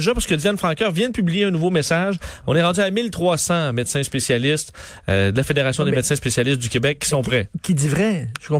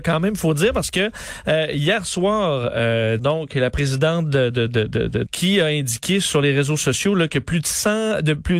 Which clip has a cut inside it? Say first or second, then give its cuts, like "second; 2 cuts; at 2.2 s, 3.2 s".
second; 2 cuts; at 3.2 s, 5.3 s